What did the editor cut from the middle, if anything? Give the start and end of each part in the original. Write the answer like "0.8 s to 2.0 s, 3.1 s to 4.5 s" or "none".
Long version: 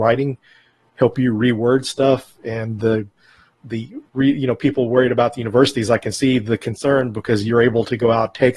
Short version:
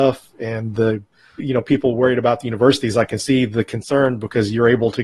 3.4 s to 4.3 s